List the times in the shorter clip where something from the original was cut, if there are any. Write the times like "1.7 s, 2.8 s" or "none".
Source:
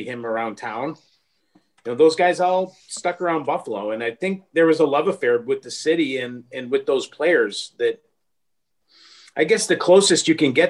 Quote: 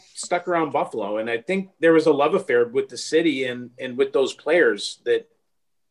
none

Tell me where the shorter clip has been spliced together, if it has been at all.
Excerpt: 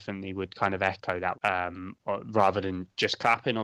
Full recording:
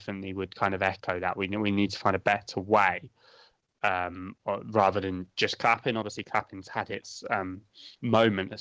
1.3 s

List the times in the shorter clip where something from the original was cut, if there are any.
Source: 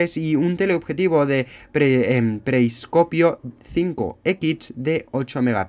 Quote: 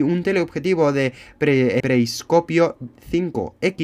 1.8 s

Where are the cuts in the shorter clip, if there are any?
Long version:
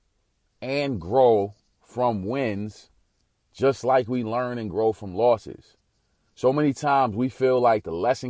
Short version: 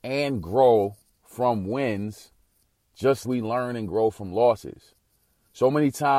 3.2 s

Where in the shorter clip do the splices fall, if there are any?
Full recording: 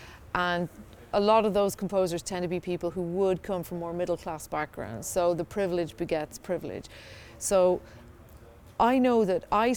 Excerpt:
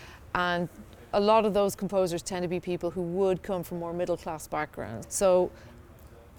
5.0 s

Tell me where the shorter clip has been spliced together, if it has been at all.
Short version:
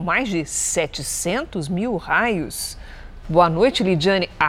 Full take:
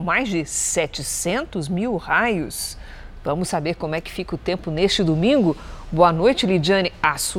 3.2 s

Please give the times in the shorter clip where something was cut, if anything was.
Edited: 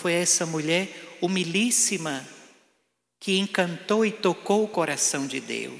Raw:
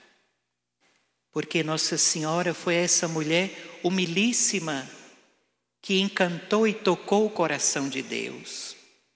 none

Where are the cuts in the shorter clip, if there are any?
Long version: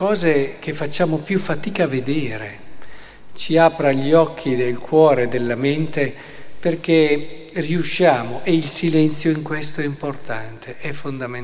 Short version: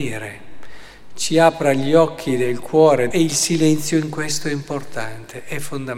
3.1 s

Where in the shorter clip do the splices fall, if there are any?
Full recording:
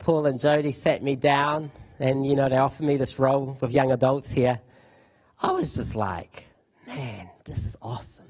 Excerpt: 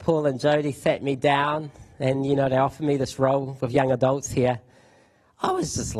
none

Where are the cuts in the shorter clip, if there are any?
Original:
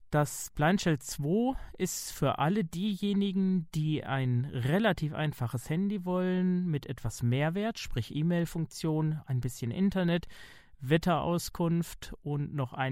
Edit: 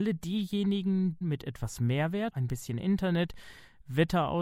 1.2 s, 2.3 s

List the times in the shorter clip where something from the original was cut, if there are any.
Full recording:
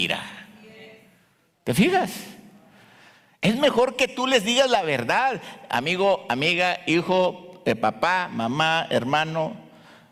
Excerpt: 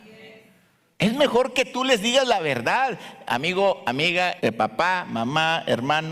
0.9 s, 4.4 s

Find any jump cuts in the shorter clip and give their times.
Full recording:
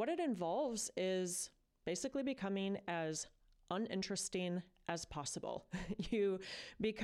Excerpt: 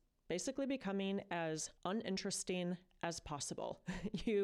1.8 s

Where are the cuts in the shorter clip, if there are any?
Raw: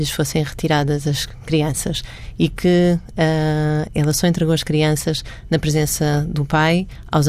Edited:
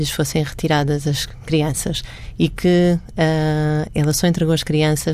none

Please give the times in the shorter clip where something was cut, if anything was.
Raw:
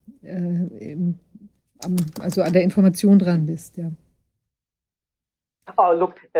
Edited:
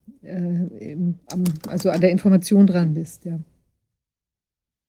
1.2 s

